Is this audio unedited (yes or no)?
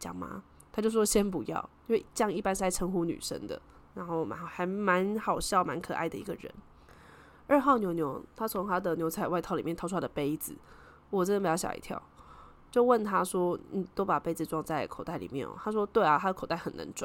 yes